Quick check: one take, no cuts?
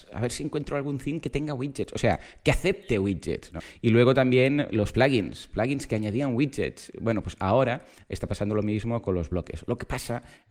yes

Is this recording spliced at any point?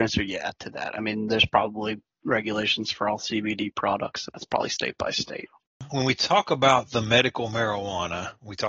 yes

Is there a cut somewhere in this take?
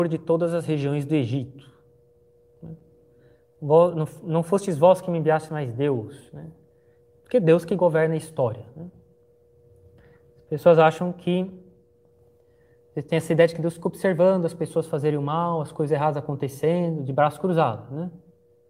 no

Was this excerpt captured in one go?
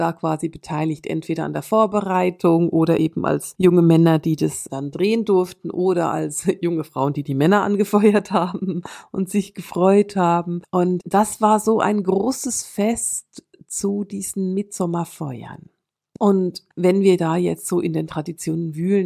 yes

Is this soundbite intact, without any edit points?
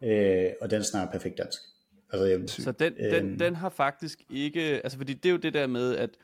no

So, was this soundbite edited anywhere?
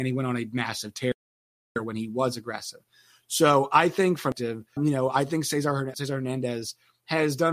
yes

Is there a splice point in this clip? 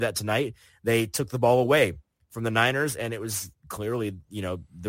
no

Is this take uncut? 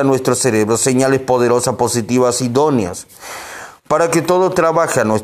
yes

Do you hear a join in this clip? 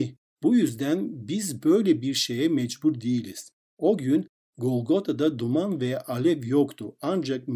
no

